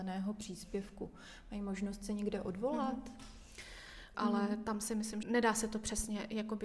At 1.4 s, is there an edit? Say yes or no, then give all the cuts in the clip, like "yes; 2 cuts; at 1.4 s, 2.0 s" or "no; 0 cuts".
no; 2 cuts; at 4.1 s, 5.2 s